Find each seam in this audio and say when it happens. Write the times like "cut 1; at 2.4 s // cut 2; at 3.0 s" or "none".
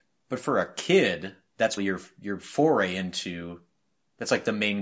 cut 1; at 1.8 s